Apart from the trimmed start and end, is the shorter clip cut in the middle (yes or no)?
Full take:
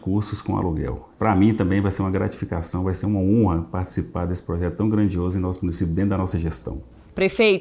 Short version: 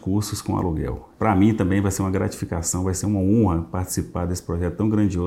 no